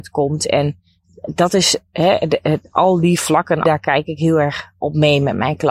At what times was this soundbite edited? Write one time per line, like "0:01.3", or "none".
0:03.6